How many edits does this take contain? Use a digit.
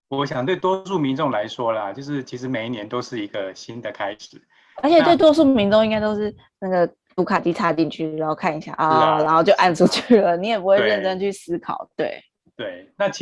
0